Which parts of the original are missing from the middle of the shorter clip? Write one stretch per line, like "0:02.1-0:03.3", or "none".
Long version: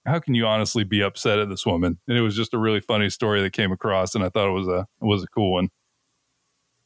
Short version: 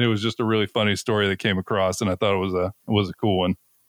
none